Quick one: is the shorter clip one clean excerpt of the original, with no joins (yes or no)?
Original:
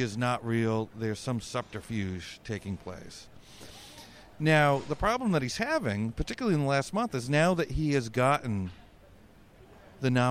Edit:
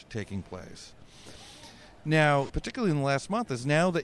no